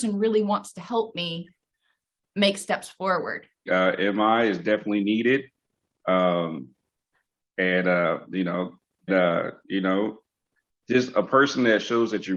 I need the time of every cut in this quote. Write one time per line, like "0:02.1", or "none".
0:03.7
0:09.1